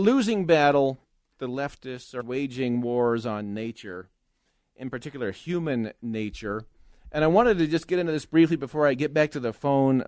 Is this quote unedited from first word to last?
no; 1 cut; at 2.2 s

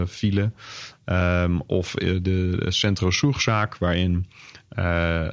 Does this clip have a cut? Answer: no; 0 cuts

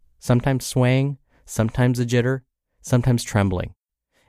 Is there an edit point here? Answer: no; 0 cuts

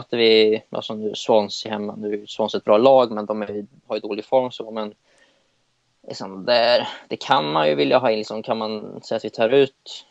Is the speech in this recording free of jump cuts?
yes; 0 cuts

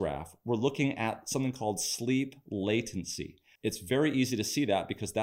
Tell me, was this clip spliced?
yes; 1 cut; at 3.6 s

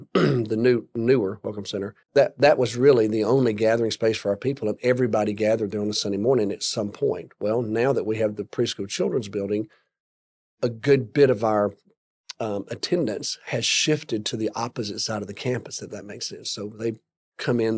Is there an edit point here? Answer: yes; 1 cut; at 2.0 s

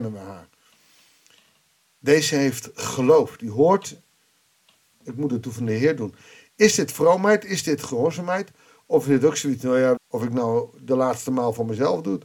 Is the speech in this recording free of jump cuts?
no; 1 cut; at 10.0 s

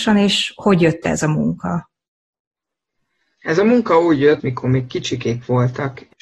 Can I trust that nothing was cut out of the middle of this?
no; 1 cut; at 4.4 s

